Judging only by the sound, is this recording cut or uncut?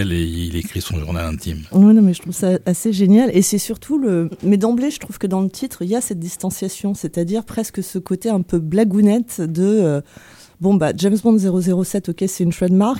uncut